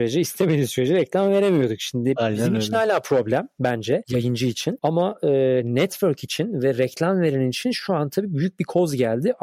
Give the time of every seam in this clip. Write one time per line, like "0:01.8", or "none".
none